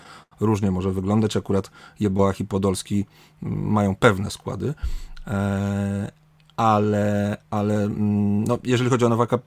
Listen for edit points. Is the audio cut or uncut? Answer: uncut